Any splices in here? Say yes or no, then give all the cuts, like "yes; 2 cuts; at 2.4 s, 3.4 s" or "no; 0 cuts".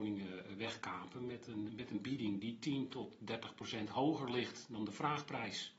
yes; 1 cut; at 1.7 s